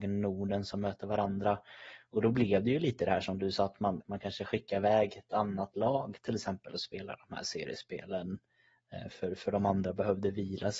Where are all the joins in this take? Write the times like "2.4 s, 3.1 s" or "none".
4.0 s